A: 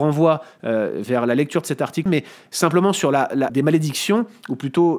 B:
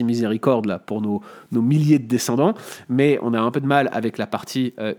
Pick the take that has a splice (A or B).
A